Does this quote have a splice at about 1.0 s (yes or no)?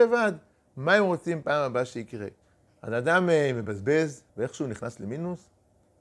no